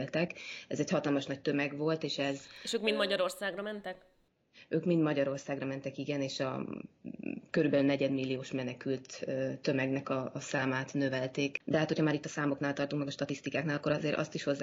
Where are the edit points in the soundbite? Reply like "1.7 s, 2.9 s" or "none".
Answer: 11.6 s